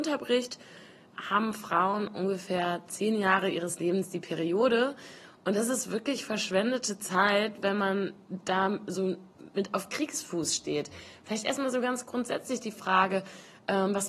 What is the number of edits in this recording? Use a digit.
0